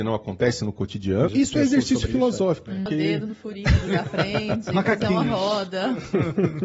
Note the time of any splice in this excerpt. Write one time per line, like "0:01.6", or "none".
0:01.3
0:02.9